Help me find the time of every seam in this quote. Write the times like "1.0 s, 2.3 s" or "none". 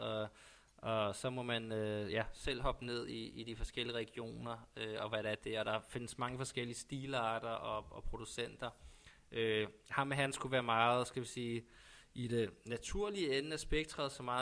none